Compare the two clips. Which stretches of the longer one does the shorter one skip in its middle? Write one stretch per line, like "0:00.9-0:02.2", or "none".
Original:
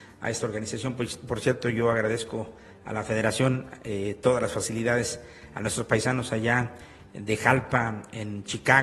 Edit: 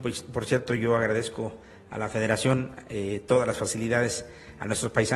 none